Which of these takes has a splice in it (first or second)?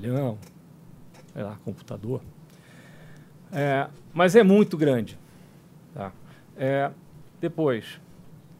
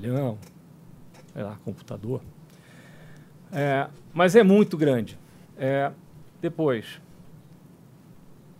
second